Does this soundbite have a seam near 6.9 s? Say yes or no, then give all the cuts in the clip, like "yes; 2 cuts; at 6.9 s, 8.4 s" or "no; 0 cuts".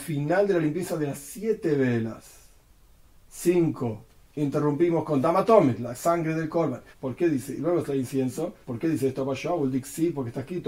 yes; 2 cuts; at 6.9 s, 8.6 s